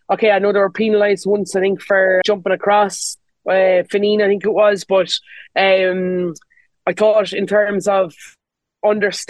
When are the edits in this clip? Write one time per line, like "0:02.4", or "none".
0:02.2

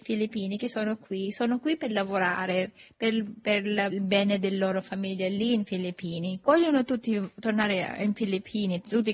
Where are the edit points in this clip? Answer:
0:03.9
0:06.4

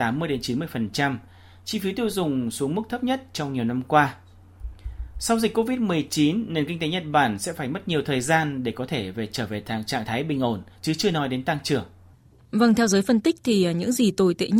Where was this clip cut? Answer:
0:10.7

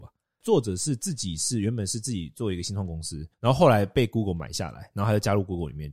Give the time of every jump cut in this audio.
0:03.3

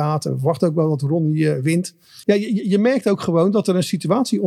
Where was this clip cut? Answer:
0:02.2

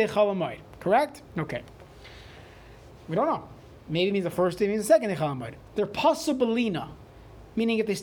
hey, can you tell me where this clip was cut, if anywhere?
0:01.3
0:03.0
0:05.6

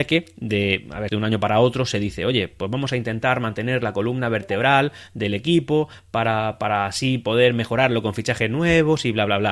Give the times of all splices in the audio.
0:01.1

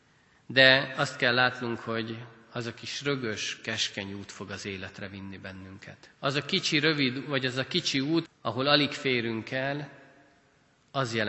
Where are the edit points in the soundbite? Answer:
0:06.1
0:08.2

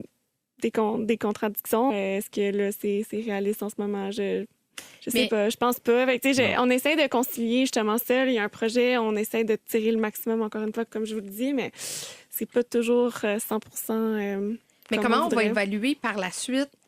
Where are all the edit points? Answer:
0:01.9
0:10.9
0:12.5

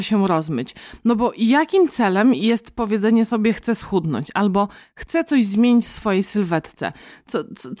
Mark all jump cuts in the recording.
none

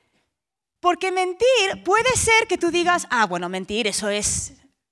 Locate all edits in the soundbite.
none

